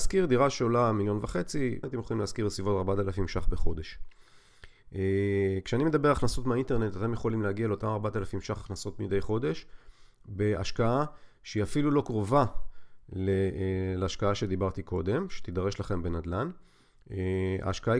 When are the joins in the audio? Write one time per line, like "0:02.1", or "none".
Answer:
0:01.8

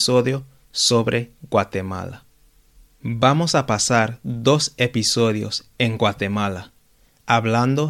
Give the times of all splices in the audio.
none

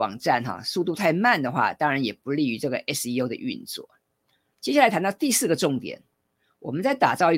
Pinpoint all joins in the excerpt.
0:04.5

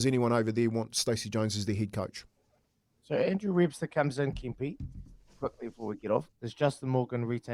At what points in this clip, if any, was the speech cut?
0:06.3

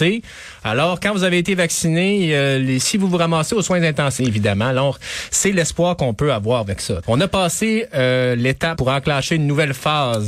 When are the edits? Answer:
0:04.2
0:07.0
0:08.8

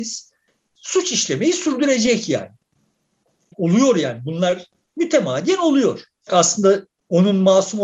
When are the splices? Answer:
0:03.5
0:06.3

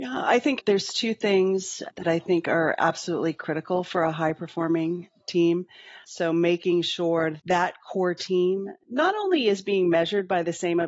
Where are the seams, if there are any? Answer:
0:06.0
0:07.4

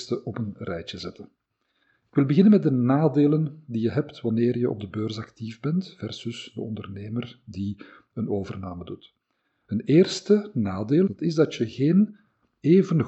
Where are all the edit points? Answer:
0:11.1

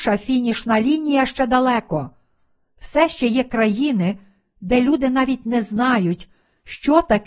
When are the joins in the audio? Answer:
none

